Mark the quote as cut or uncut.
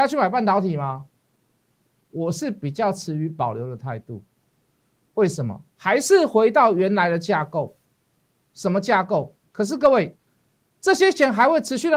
cut